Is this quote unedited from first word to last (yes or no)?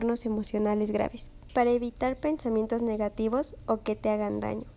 no